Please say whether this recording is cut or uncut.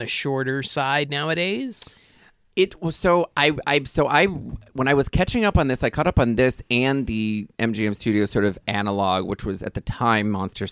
uncut